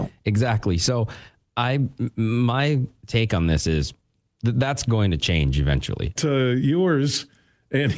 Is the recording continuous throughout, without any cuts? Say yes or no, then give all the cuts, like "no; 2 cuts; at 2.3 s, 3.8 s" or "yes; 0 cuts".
no; 1 cut; at 6.2 s